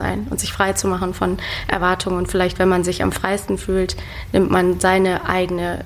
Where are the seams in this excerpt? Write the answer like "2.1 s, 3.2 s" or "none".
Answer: none